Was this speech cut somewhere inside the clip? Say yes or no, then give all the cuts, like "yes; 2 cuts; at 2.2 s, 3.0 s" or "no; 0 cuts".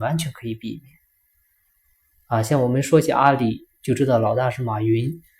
yes; 1 cut; at 2.1 s